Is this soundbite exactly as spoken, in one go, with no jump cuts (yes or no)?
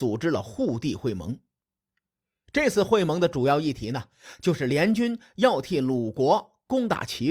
yes